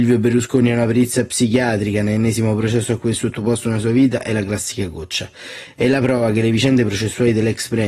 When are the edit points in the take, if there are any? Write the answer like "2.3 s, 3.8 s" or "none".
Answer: none

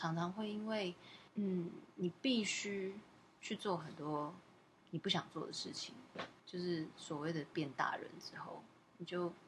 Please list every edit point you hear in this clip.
1.3 s, 6.4 s

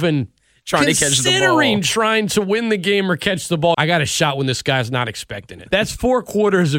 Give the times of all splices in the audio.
3.7 s, 5.7 s

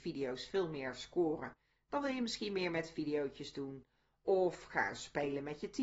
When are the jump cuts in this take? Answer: none

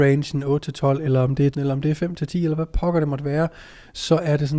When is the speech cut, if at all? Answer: 1.5 s

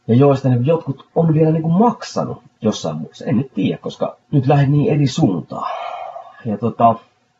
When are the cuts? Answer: 2.5 s, 4.2 s

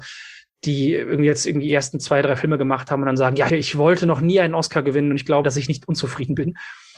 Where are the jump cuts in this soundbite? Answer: 3.5 s, 5.4 s

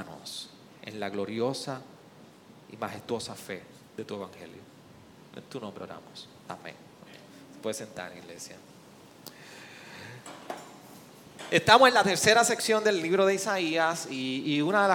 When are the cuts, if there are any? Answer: none

